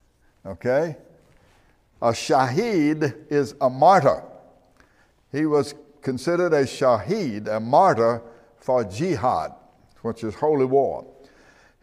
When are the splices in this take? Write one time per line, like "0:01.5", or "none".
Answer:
none